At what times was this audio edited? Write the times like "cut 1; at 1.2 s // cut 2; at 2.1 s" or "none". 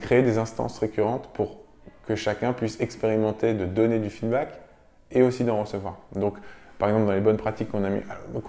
none